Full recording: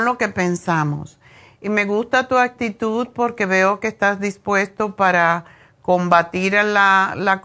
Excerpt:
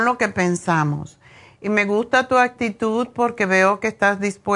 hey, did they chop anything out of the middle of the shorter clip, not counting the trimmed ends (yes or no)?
no